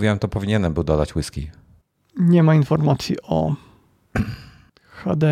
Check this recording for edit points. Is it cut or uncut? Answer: uncut